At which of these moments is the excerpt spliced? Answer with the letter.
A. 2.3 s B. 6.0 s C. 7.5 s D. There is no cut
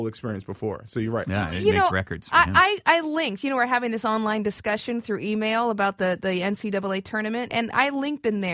C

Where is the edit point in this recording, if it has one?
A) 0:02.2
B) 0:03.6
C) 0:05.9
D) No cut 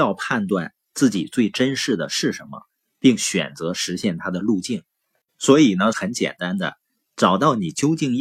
C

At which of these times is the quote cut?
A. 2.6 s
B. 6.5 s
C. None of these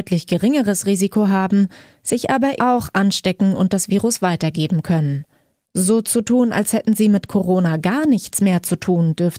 A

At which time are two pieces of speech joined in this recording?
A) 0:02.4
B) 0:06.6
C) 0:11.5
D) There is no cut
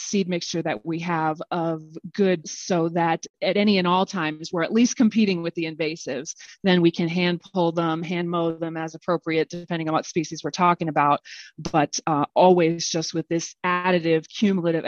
A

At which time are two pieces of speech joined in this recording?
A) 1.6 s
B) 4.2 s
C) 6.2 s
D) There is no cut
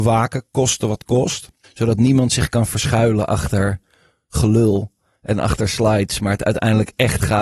A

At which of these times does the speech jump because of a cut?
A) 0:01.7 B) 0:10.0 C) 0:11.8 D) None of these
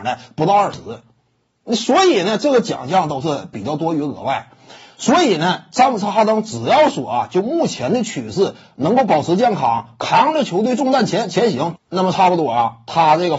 C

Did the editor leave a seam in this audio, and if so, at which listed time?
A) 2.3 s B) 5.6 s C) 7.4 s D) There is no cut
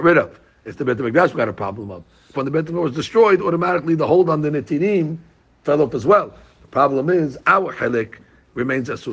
A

